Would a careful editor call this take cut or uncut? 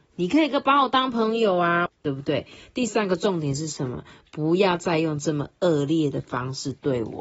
cut